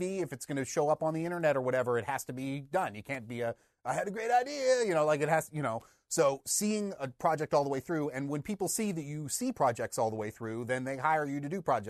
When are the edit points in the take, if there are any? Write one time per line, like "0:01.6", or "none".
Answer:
none